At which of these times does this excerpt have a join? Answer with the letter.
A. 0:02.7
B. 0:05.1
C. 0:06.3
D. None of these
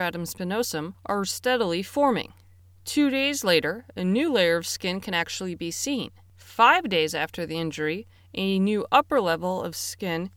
D